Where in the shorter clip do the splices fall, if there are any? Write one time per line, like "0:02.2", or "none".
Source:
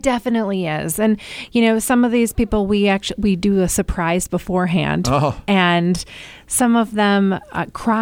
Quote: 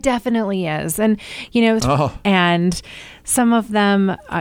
0:01.8